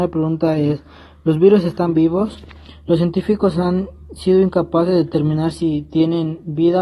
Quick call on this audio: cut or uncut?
uncut